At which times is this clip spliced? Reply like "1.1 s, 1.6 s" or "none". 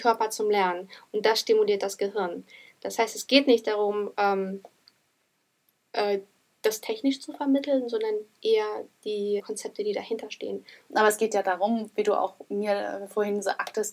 9.4 s, 10.9 s